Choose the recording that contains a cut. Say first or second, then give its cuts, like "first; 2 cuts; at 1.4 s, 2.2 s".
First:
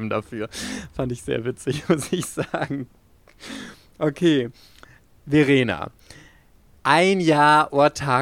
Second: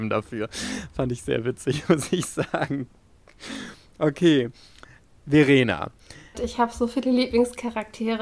second; 1 cut; at 6.3 s